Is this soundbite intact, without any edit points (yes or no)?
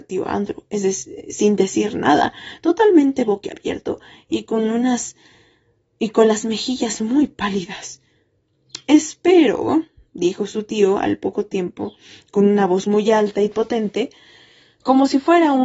yes